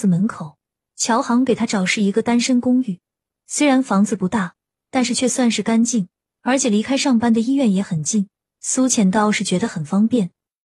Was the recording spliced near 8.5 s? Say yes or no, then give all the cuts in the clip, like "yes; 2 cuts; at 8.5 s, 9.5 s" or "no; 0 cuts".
no; 0 cuts